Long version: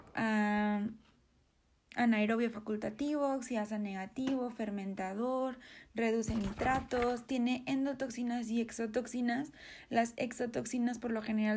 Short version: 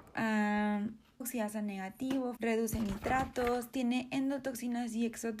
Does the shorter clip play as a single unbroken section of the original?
no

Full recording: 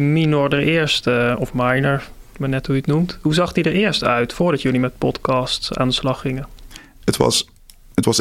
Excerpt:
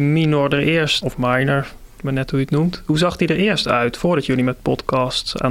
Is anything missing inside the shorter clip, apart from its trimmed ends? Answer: yes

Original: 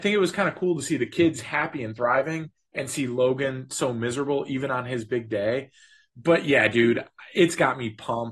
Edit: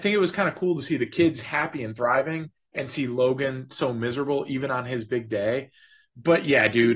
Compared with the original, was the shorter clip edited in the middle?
no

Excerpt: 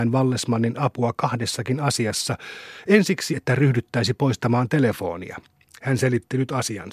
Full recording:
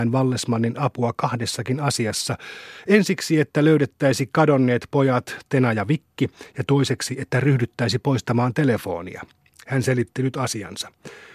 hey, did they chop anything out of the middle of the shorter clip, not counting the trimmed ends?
yes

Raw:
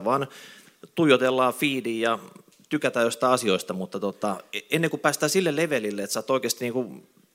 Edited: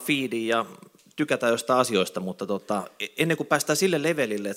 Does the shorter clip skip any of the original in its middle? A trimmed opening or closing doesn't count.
no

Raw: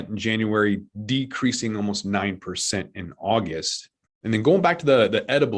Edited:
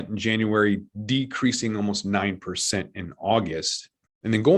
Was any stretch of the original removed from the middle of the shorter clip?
no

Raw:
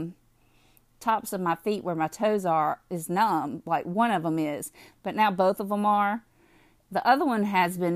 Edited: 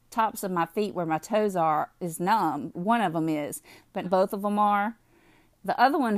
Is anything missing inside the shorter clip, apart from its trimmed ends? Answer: yes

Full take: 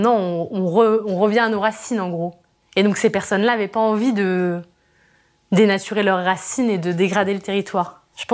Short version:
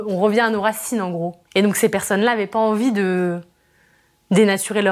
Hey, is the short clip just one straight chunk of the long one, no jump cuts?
no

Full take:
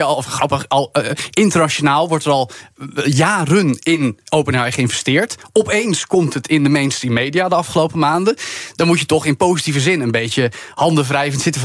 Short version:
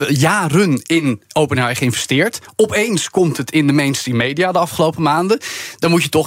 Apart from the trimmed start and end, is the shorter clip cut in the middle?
no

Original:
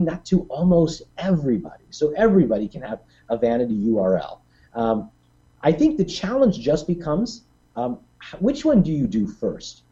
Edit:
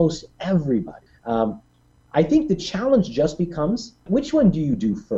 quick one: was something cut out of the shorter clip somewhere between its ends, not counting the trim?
yes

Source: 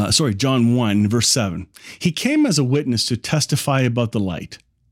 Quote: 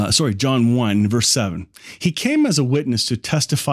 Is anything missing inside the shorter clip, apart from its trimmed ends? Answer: no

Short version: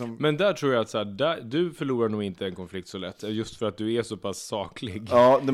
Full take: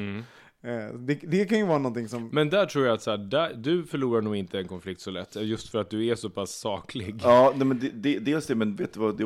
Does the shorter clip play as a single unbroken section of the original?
yes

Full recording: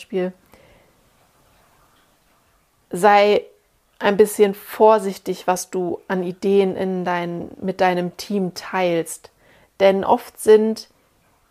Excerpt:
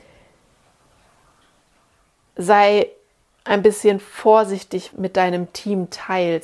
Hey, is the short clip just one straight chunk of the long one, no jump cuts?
no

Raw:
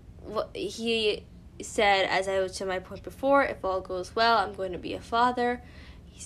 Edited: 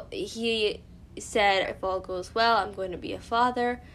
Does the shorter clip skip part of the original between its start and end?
yes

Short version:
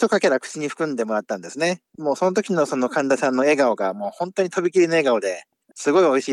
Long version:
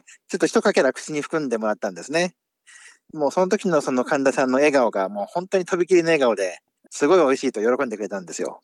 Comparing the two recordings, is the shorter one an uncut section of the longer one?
no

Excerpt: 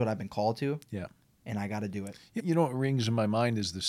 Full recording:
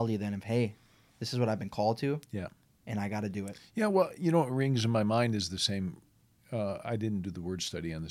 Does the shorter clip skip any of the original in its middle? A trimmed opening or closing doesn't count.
yes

